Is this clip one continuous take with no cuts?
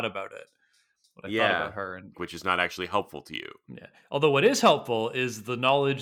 no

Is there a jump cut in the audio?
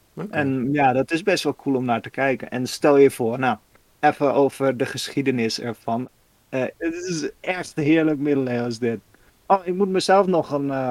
yes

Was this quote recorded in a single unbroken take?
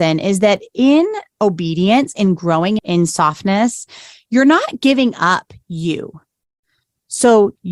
no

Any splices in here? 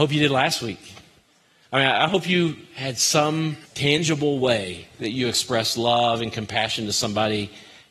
yes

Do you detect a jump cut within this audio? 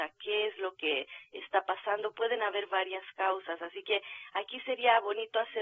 no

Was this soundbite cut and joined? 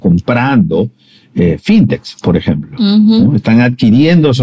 no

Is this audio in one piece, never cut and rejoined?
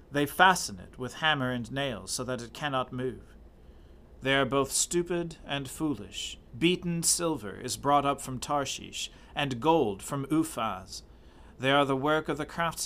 no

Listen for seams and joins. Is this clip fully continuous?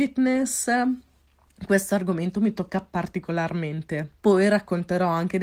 no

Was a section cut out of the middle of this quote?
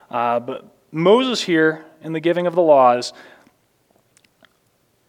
no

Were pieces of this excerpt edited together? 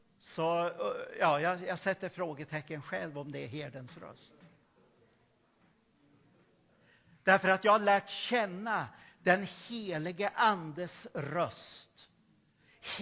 no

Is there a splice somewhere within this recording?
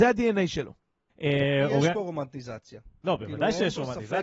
yes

